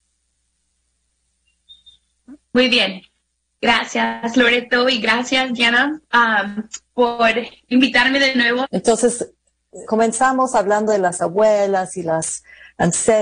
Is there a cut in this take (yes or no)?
yes